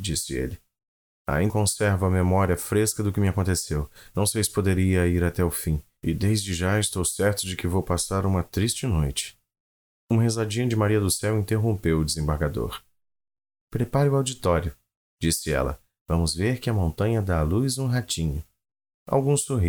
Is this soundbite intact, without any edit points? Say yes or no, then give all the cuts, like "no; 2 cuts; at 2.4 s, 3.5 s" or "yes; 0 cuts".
no; 1 cut; at 1.5 s